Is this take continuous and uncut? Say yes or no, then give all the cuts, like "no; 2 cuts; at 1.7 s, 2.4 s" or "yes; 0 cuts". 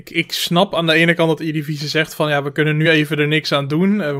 yes; 0 cuts